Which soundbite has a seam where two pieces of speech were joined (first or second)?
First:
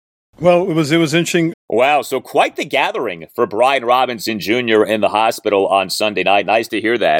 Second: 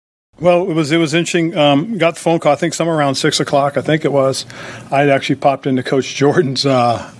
first